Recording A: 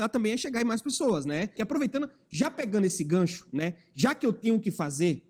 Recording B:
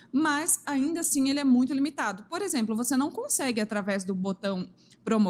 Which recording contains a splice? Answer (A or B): A